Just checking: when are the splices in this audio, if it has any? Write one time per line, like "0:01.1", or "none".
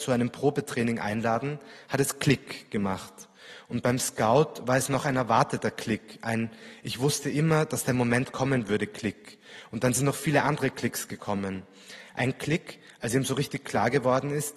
none